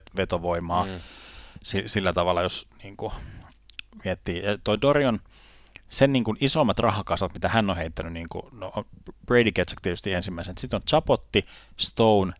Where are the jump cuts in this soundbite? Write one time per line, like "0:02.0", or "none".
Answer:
none